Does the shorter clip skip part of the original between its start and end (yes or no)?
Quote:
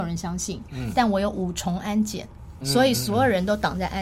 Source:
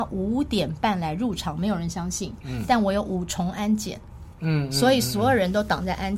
yes